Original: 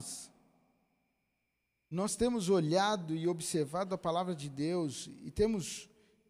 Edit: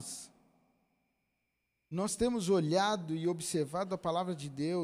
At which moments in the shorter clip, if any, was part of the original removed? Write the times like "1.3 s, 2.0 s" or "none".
none